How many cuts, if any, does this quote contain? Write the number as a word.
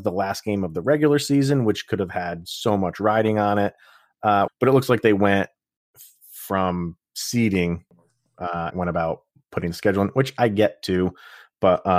two